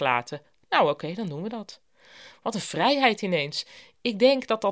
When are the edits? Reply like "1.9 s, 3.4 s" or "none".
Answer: none